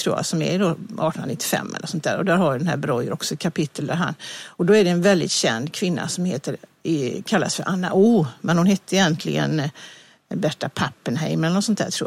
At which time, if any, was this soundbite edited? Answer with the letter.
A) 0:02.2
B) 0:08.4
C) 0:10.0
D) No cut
D